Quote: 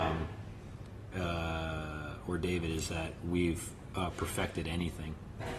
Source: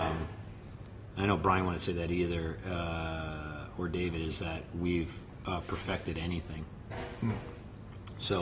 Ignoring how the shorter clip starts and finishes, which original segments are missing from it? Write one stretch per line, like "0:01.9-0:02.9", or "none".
0:01.1-0:02.6